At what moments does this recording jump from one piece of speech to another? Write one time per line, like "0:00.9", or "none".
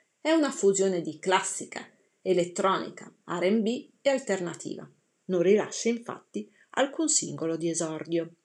0:03.2
0:05.2